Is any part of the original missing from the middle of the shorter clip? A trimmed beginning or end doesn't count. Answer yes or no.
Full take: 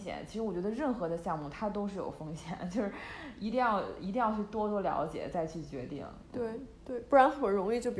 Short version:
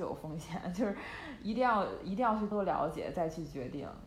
yes